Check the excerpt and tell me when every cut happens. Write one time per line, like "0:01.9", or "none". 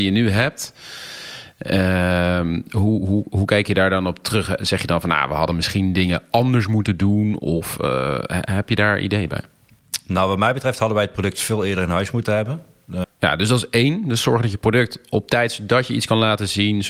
0:13.0

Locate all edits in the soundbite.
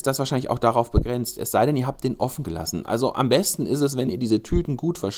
none

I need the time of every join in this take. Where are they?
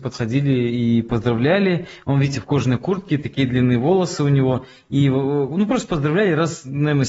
none

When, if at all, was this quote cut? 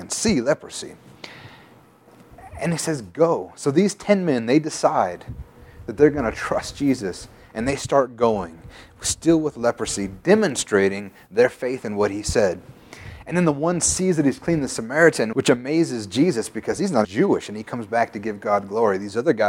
0:15.3
0:17.0

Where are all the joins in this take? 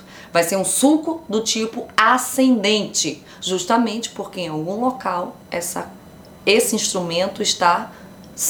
none

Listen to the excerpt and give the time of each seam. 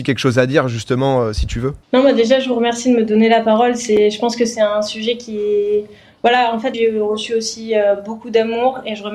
0:01.8
0:06.7

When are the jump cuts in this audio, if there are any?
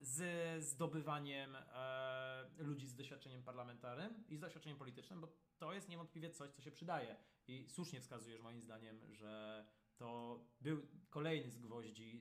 none

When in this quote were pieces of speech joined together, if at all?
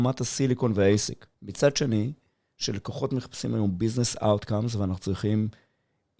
0:01.3

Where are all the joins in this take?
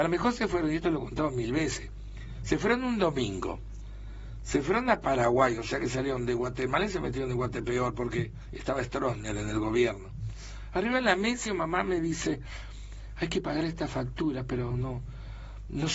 0:11.5
0:14.7

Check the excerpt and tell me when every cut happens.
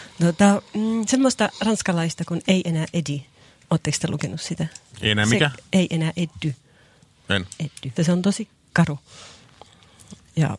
0:08.0

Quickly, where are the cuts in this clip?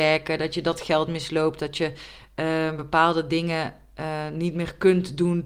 none

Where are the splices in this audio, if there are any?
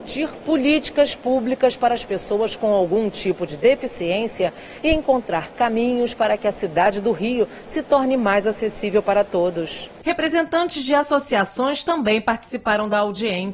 none

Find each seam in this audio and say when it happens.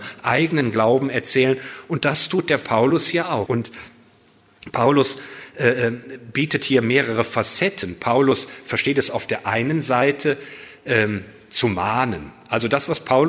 0:03.5

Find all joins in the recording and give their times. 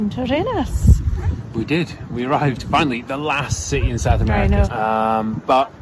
0:04.6

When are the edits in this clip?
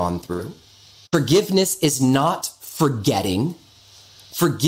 0:01.1

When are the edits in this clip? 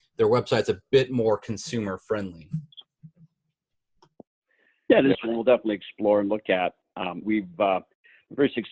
0:05.1
0:07.2

